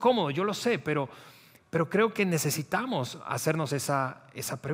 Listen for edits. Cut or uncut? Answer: uncut